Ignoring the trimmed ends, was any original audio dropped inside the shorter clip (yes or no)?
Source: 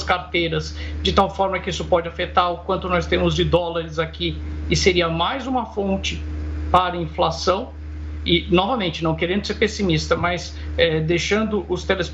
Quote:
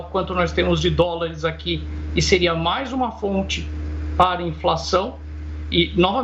no